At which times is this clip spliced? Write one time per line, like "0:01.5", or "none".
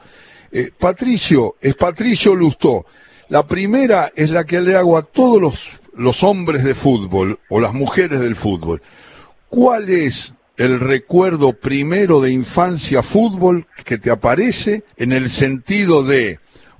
0:13.8
0:14.9